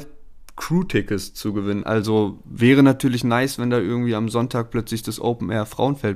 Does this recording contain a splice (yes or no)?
yes